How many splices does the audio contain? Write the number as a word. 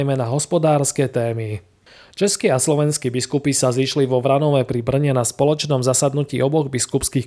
zero